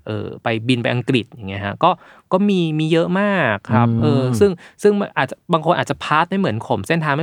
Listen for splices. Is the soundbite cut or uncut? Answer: uncut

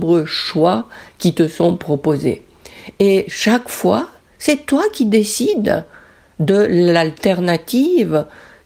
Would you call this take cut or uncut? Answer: uncut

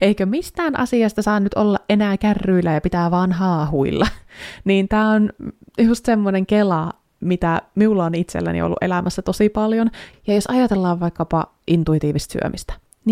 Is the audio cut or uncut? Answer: uncut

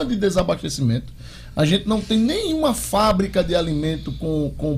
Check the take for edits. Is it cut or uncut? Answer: uncut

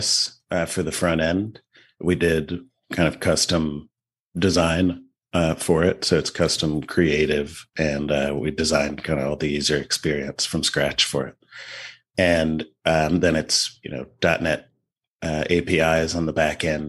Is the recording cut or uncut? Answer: uncut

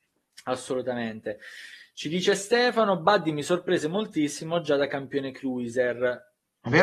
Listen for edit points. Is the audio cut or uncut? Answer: uncut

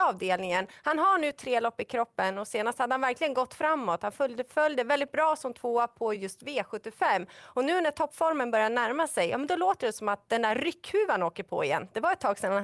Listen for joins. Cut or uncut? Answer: uncut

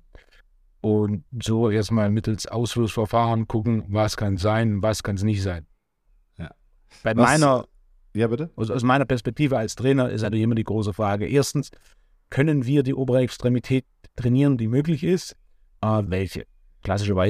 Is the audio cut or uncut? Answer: cut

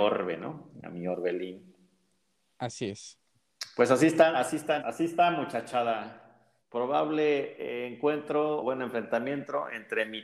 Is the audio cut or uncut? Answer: cut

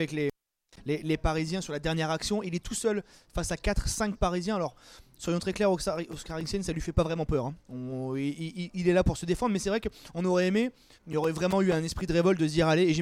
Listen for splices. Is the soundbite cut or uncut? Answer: cut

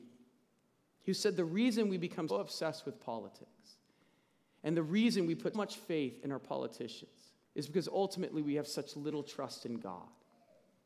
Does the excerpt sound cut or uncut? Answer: cut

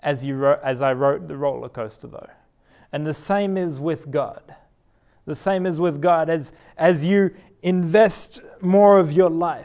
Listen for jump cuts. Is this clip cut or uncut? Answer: uncut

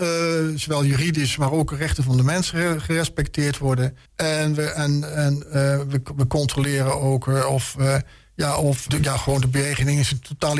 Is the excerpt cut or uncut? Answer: cut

